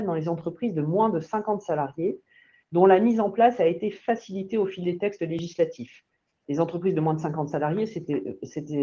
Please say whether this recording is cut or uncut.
uncut